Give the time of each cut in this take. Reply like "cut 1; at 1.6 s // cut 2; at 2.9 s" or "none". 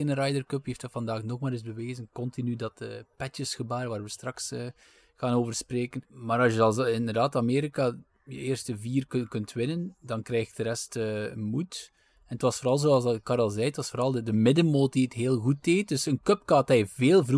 cut 1; at 6.0 s